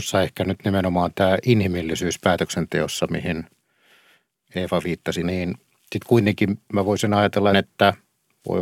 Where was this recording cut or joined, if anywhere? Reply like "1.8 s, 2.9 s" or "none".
5.2 s, 7.5 s